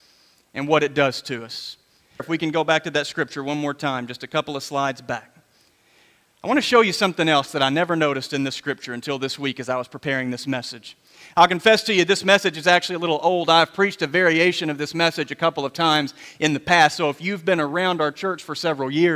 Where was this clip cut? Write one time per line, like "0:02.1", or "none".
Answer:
0:02.2